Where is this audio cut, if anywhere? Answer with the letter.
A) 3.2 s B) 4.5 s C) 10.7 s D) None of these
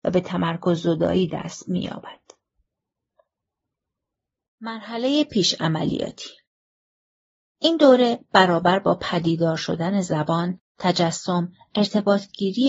D